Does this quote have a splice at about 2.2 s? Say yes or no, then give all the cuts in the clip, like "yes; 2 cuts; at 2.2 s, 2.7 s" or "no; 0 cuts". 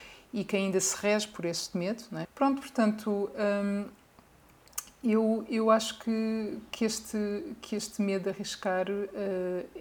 yes; 1 cut; at 2.2 s